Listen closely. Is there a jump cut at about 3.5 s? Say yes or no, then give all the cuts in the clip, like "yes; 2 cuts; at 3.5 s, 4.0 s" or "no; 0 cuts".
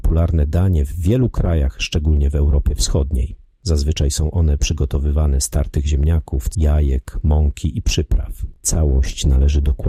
no; 2 cuts; at 6.5 s, 8.6 s